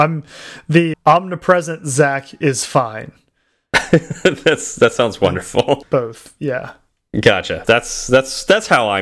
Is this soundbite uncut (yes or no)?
no